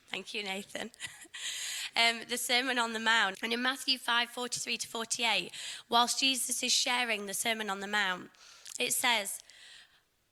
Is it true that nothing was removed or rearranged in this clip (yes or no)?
no